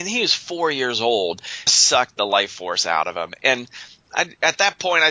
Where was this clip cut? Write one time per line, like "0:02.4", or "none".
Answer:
0:01.7